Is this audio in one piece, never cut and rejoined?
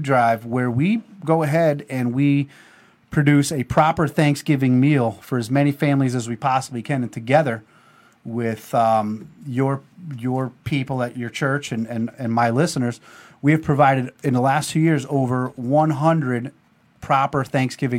yes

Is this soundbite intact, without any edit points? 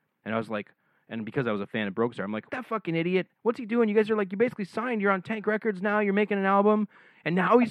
no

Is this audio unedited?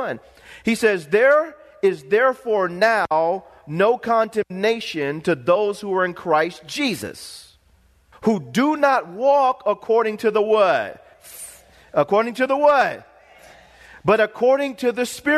no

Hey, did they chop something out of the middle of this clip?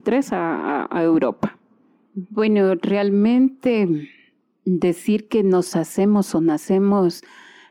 yes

